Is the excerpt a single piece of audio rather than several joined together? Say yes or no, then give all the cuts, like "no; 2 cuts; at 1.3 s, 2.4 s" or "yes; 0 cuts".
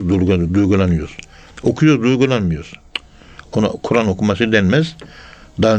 yes; 0 cuts